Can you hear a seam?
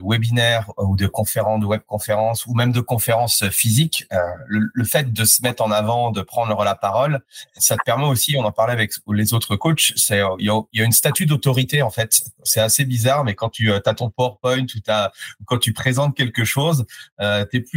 yes; 1 cut; at 7.6 s

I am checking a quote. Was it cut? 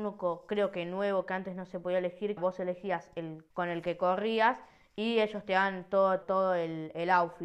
yes; 3 cuts; at 2.4 s, 3.5 s, 6.2 s

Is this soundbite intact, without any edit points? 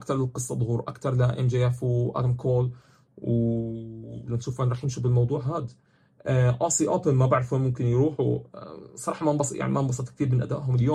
yes; 0 cuts

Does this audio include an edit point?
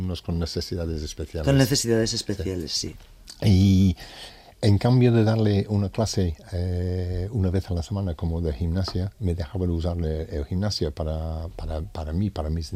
no; 0 cuts

